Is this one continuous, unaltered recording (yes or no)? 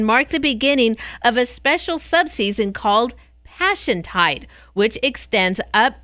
yes